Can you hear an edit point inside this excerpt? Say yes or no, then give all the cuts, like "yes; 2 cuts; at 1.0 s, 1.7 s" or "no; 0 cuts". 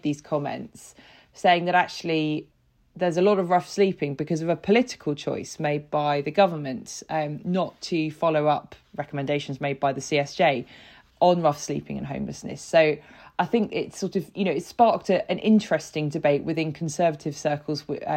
no; 0 cuts